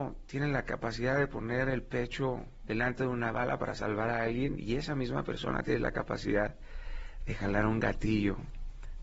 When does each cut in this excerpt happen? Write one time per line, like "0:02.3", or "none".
none